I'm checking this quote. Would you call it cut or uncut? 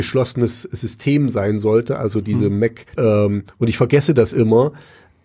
cut